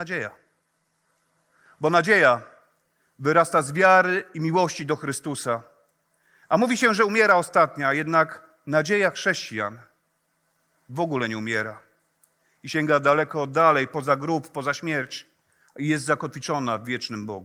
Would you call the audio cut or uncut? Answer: uncut